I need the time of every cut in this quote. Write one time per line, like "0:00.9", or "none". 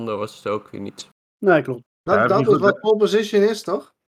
0:01.8